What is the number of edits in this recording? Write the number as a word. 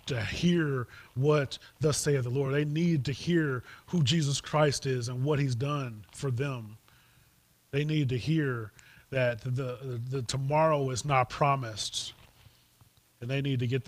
zero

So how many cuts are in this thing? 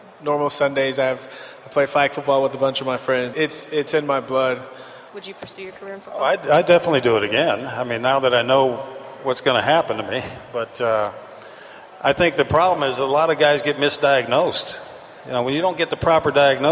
two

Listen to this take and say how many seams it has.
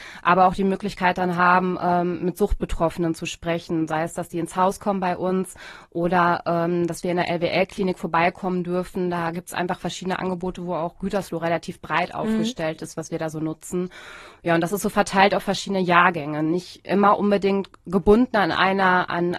zero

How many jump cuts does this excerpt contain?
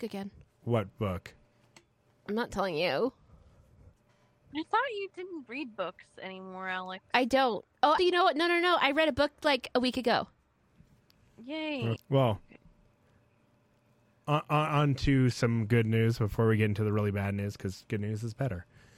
two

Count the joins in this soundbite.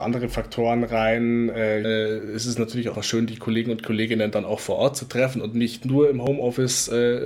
two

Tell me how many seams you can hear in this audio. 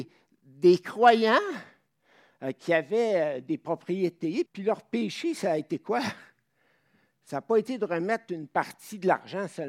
one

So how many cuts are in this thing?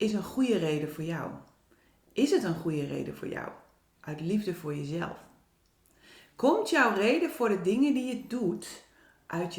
zero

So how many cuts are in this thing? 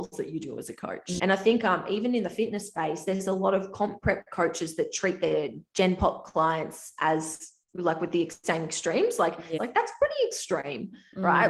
two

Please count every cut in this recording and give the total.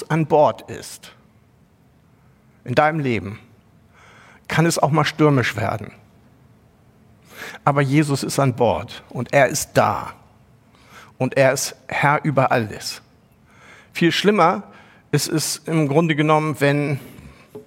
zero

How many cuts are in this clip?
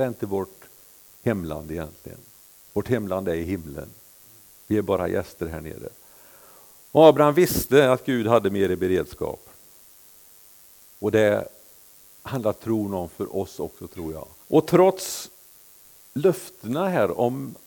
one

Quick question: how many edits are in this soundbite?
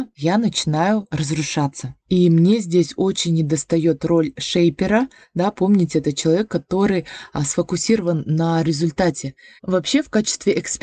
one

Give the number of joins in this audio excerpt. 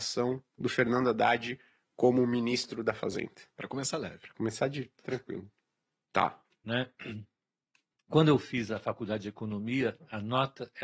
two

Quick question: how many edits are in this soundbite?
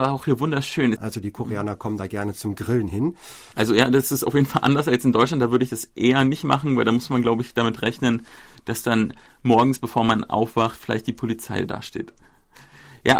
two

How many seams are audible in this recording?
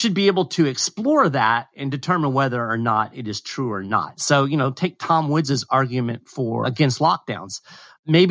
two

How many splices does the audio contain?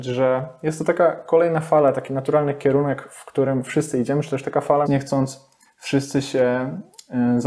one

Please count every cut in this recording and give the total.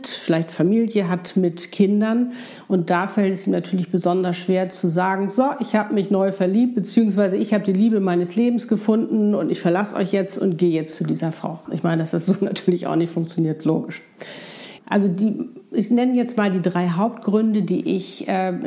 two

